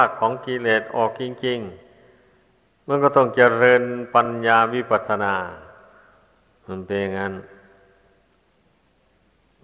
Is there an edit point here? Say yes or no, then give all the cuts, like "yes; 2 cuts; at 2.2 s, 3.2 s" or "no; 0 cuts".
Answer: no; 0 cuts